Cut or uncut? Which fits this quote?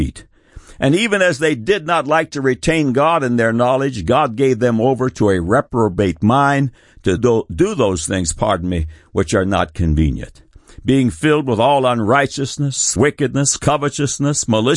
cut